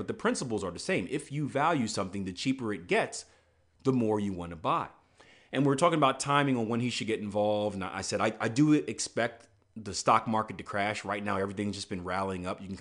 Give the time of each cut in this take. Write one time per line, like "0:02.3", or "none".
0:09.6